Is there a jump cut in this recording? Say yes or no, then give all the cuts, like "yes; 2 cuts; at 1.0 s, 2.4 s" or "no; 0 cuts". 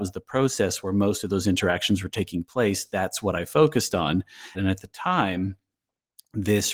yes; 1 cut; at 4.5 s